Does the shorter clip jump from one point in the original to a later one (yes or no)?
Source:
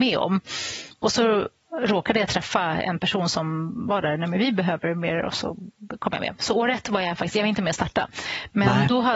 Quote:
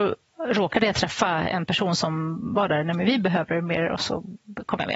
no